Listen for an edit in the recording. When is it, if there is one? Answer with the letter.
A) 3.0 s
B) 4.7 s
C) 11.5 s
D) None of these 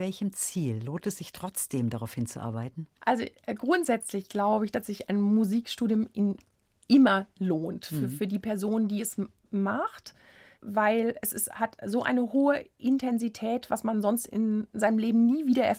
A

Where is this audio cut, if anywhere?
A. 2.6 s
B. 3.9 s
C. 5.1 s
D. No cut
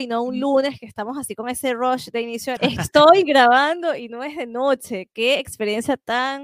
A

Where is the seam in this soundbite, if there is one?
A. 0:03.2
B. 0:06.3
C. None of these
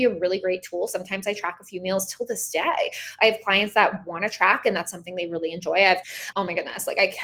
B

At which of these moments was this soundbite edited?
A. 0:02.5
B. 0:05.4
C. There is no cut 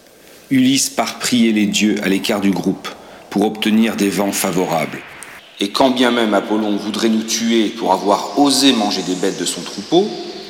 B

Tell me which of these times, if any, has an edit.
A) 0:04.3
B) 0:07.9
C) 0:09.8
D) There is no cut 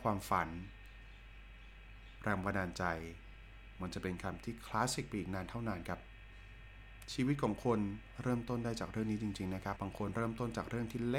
C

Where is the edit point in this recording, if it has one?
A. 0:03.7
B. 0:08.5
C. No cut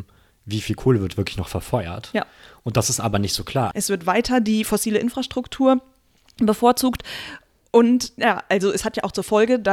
A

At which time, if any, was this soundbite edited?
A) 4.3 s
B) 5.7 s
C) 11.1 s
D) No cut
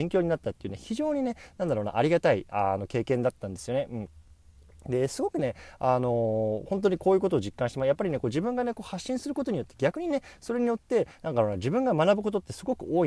D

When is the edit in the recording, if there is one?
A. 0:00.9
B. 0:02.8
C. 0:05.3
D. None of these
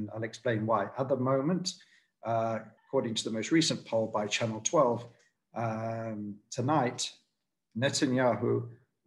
B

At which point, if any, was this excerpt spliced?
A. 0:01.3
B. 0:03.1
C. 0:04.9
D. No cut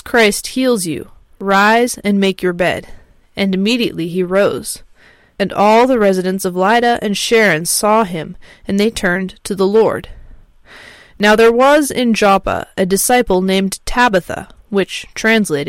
D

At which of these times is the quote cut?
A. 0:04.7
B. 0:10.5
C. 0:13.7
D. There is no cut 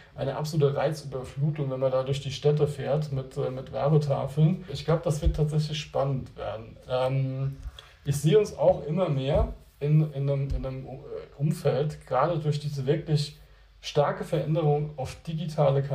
A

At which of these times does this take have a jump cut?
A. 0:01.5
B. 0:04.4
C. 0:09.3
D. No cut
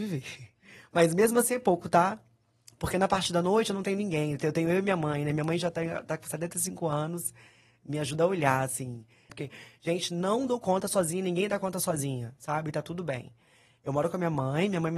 C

